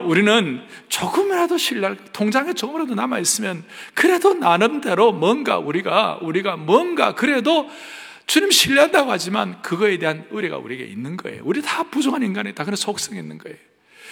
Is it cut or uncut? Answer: uncut